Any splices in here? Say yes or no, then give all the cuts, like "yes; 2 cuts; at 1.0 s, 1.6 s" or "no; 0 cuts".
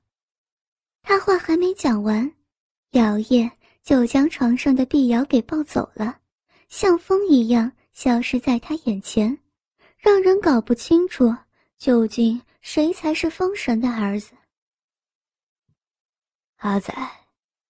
no; 0 cuts